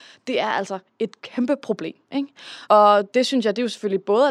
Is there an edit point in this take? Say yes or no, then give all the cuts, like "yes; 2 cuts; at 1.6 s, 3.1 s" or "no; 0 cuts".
yes; 2 cuts; at 1.2 s, 2.7 s